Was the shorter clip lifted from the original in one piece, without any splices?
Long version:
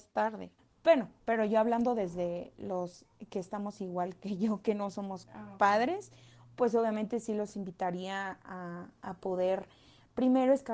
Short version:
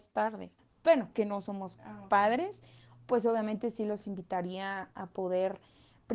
no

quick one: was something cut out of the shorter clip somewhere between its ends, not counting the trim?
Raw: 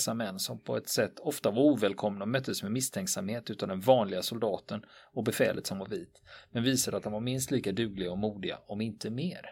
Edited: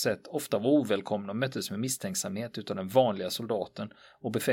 no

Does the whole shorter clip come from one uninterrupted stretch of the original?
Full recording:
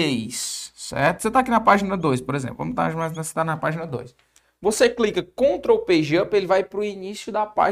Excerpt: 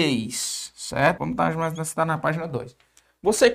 no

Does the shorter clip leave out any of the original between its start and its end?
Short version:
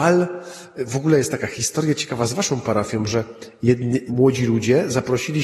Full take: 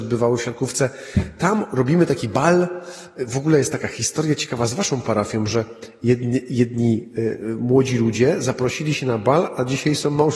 yes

